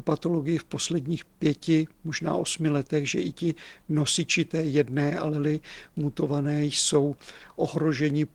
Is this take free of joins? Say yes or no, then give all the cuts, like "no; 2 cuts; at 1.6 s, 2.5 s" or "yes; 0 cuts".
yes; 0 cuts